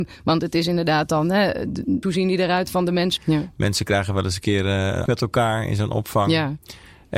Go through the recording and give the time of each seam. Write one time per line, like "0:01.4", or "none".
0:02.0
0:03.2
0:05.1